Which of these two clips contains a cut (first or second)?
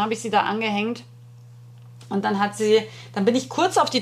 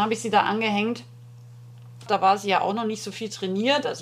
second